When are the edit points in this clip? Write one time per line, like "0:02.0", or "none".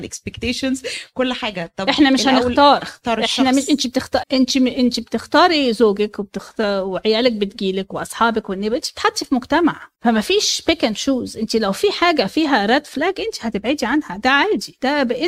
0:04.2
0:09.9